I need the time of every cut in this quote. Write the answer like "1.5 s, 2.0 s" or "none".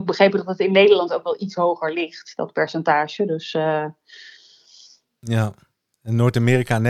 none